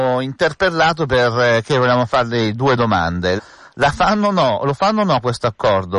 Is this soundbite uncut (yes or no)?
no